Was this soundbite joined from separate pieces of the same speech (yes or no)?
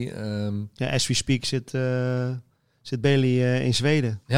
no